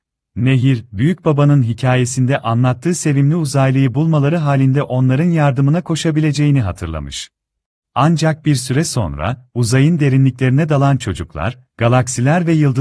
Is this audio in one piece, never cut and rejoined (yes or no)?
no